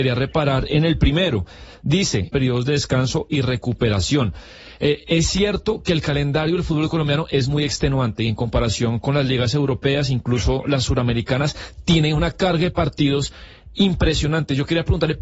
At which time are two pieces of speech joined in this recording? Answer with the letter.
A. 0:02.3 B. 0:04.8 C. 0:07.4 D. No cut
A